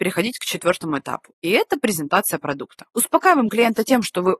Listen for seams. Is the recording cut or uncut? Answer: uncut